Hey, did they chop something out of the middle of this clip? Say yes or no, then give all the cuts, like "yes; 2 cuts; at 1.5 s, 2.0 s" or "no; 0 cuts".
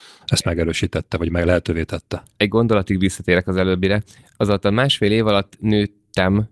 no; 0 cuts